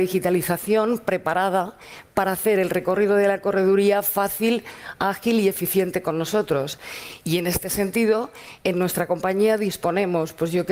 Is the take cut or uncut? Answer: uncut